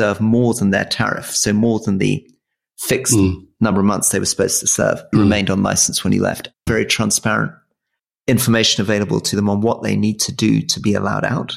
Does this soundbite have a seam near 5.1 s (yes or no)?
yes